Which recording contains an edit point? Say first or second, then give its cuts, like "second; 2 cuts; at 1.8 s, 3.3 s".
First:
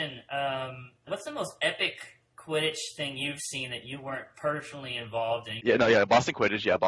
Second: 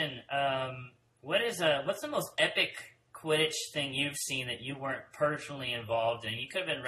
first; 2 cuts; at 1.1 s, 5.6 s